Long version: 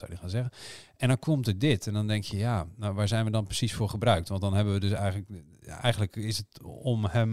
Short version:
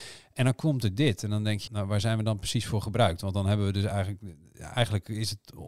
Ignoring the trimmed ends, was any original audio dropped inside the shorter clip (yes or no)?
yes